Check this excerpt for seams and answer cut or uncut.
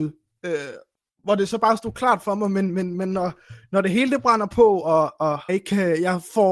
cut